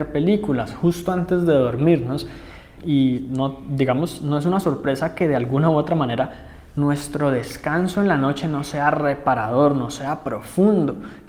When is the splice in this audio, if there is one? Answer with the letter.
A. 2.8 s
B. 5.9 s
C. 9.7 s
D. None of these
A